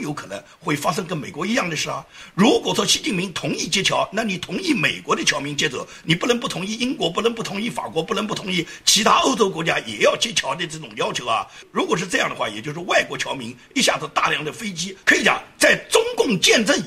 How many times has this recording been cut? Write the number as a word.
one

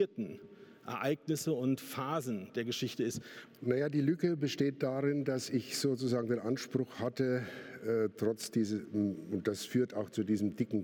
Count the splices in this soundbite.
one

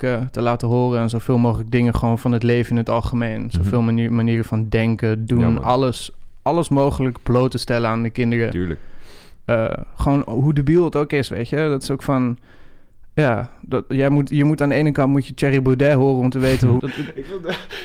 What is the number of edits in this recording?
one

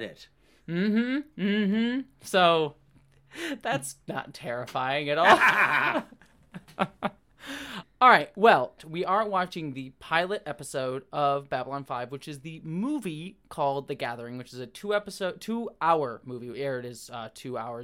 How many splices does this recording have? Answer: one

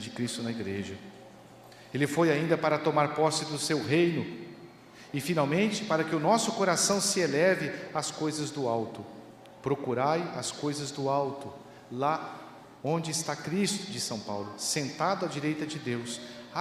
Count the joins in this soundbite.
zero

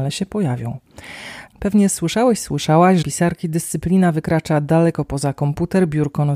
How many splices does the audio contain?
two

